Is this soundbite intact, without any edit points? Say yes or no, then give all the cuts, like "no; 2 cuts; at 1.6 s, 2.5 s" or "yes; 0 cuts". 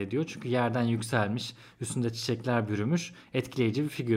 yes; 0 cuts